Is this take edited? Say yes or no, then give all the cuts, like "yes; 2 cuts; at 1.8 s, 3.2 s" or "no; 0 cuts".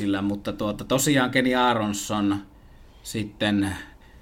no; 0 cuts